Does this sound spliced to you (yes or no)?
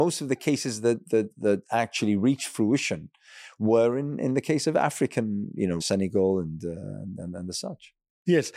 yes